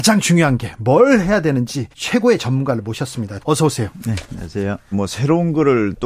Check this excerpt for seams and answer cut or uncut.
cut